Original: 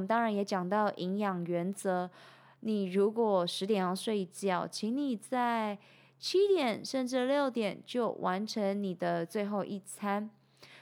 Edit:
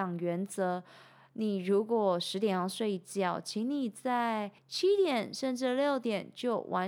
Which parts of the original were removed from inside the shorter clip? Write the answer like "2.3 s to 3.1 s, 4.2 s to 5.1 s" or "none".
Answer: 5.9 s to 6.1 s

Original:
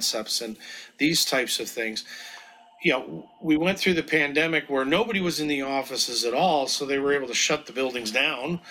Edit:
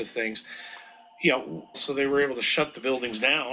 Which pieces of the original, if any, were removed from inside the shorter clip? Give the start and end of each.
3.3 s to 6.7 s

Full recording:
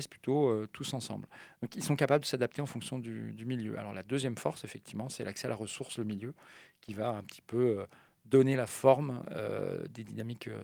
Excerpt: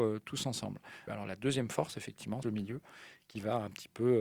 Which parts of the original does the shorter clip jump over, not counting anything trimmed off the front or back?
1.5 s to 3.7 s, 5.1 s to 6.0 s

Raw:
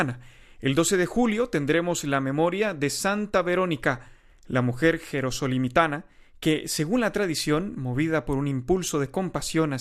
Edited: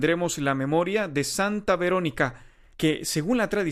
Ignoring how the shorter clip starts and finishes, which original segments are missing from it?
4.4 s to 6.4 s

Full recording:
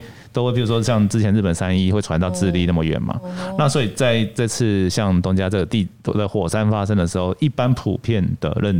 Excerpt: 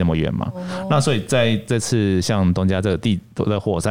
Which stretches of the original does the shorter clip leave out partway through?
none

